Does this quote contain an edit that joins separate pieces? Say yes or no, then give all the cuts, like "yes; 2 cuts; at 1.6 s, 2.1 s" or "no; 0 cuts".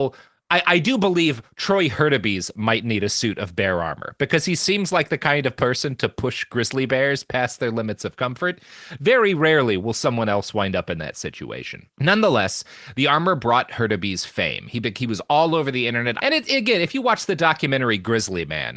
yes; 2 cuts; at 11.9 s, 16.2 s